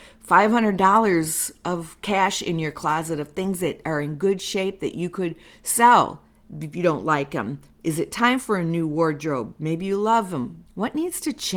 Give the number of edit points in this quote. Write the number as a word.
one